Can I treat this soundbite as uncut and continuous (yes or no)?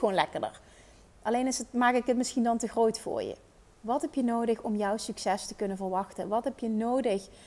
yes